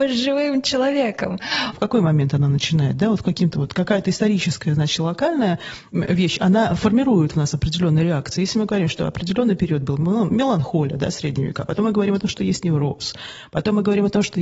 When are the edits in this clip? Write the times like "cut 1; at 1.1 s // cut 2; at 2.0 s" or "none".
cut 1; at 1.7 s